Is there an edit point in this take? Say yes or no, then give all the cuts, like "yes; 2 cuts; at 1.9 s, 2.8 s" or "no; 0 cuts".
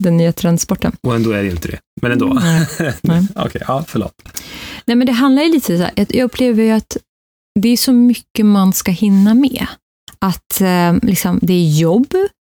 no; 0 cuts